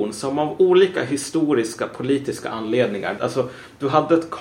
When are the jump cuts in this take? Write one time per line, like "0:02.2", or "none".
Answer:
0:03.2